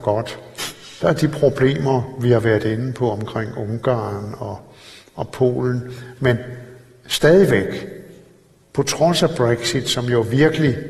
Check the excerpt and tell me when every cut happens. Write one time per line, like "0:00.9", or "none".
none